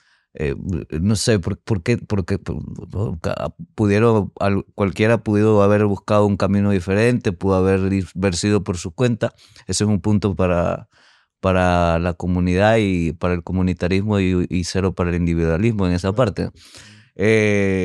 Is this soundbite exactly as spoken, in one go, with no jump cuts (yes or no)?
yes